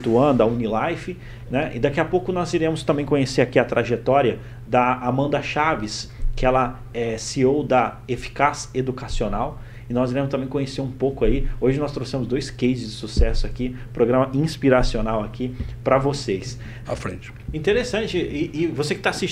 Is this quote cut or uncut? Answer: cut